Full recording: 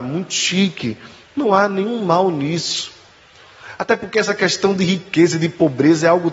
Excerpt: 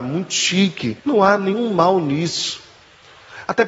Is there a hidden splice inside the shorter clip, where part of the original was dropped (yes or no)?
yes